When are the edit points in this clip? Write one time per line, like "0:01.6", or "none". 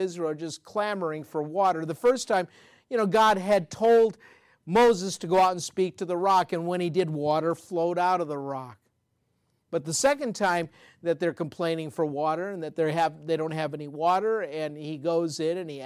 none